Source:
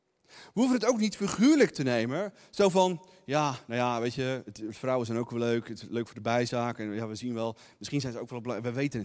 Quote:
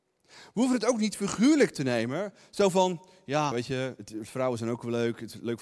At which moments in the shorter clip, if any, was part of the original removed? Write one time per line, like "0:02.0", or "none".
0:03.5